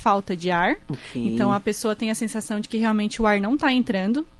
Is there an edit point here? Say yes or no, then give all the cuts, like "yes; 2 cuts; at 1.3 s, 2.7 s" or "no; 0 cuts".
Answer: no; 0 cuts